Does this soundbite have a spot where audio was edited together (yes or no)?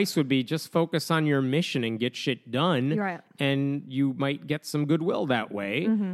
no